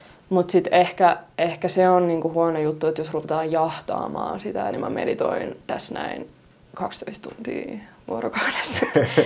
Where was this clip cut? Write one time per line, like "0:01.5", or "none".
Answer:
0:04.7